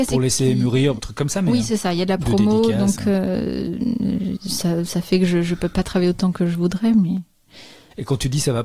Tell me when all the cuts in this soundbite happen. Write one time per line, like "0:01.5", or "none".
0:01.0